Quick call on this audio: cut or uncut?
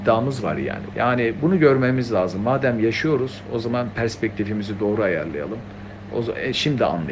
cut